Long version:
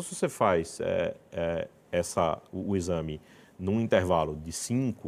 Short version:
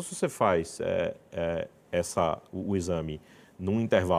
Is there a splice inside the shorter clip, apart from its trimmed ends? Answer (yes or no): no